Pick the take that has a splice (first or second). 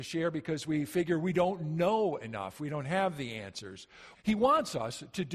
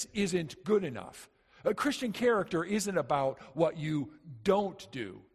first